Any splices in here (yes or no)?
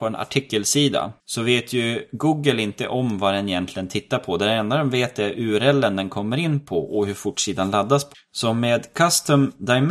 yes